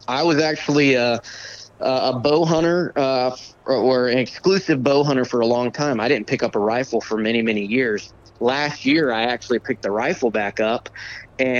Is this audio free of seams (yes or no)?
yes